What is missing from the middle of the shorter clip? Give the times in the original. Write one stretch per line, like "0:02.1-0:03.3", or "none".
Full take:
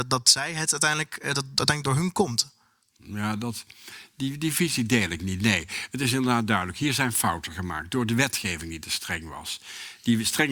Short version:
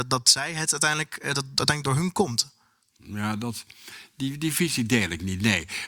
none